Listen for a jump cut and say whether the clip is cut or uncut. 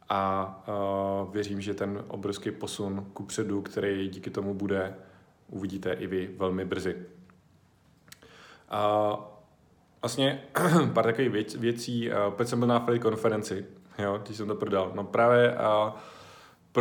uncut